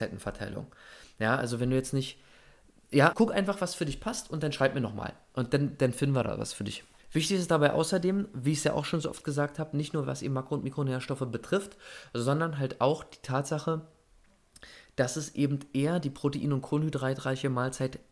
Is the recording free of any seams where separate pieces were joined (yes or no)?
no